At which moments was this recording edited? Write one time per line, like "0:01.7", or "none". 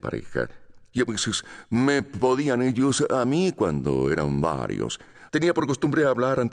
0:00.9
0:05.3